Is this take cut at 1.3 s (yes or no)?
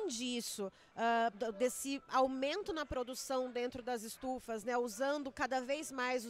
yes